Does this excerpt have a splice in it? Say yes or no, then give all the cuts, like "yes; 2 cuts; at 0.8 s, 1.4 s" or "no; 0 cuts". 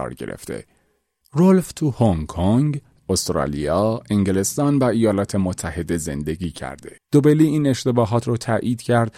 yes; 2 cuts; at 1.2 s, 7.0 s